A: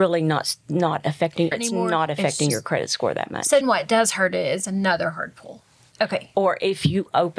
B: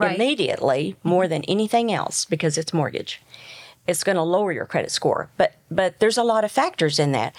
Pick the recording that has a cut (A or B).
A